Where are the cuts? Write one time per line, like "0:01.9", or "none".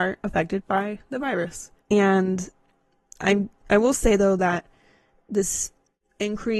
0:01.8